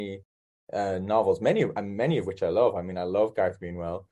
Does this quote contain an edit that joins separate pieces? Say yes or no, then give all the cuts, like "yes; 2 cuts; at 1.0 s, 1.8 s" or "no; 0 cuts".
no; 0 cuts